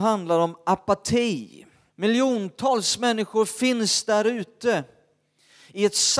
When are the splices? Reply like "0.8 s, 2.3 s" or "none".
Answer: 1.9 s